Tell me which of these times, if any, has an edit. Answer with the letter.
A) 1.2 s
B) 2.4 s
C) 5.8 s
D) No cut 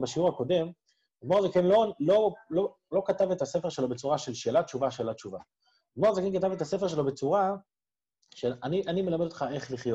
D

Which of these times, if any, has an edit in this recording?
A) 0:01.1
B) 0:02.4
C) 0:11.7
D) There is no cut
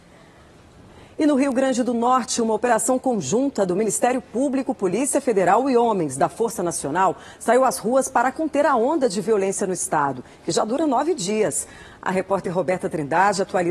D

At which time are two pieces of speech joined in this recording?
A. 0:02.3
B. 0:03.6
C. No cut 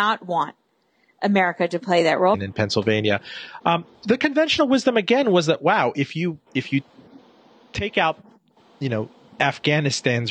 A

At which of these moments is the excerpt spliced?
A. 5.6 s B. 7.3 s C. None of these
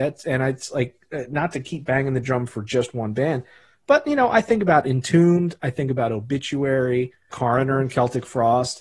B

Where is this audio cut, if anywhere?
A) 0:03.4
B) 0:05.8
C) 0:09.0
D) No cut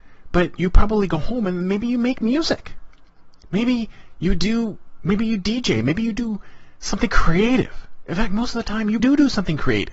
C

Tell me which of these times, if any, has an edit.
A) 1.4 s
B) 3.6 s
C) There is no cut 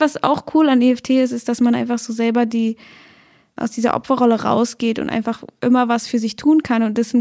B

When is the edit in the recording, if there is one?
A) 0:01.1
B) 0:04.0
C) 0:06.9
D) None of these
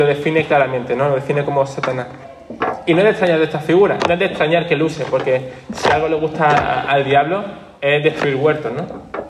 B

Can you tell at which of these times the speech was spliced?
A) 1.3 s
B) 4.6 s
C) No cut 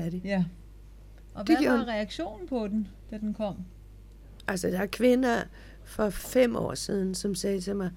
A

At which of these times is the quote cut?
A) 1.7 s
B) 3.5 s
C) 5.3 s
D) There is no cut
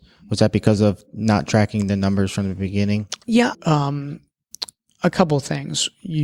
B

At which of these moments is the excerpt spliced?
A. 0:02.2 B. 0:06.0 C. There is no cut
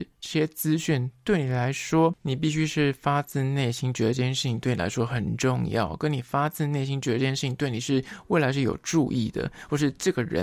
A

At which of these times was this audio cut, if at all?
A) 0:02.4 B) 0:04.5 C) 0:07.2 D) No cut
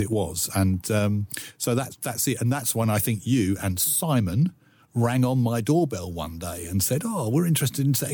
D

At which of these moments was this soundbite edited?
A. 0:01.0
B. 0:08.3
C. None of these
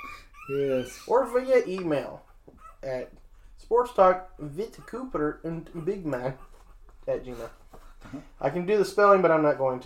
C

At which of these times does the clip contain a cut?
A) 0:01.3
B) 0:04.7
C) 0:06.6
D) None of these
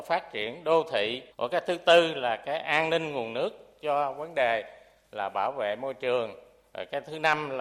A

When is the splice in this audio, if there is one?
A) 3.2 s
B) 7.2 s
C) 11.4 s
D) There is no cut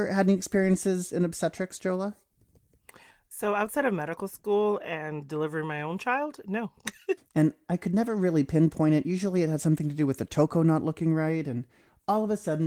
B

